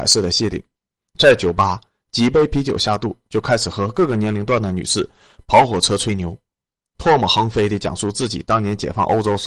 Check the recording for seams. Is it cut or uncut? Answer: uncut